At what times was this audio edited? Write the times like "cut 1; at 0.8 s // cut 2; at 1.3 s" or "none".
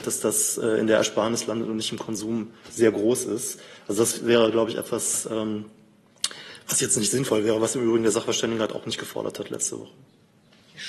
none

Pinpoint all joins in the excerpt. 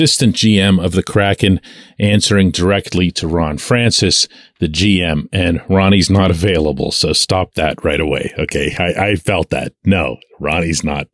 none

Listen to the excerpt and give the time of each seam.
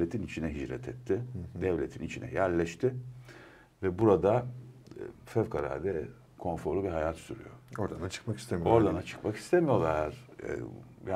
none

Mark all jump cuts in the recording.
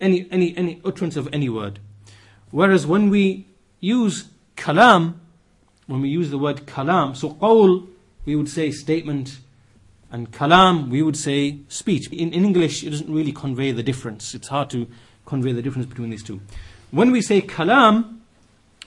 cut 1; at 12.1 s

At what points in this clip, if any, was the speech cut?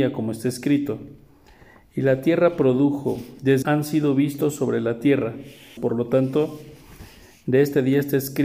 cut 1; at 3.6 s // cut 2; at 5.8 s

